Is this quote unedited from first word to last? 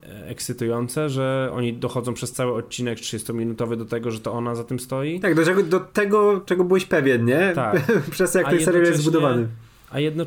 yes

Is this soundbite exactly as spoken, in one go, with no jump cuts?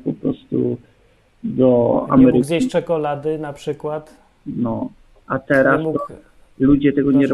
yes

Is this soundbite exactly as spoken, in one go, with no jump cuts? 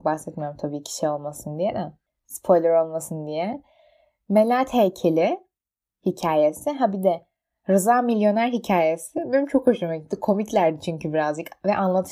yes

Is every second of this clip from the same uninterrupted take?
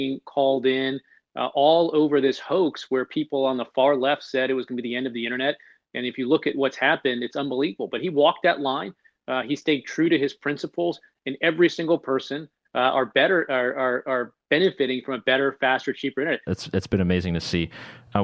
no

